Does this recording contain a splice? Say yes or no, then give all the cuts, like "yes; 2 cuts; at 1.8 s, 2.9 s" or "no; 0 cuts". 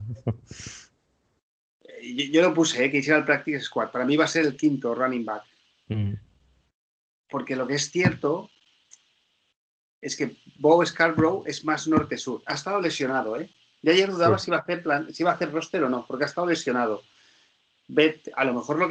no; 0 cuts